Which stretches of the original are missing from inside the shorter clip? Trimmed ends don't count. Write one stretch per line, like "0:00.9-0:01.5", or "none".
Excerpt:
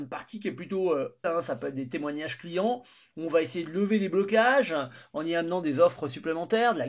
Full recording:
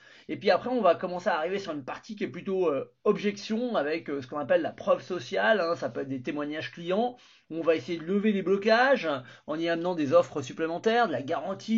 0:03.0-0:05.6